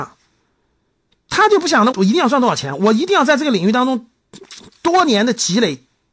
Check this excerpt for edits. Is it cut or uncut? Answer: cut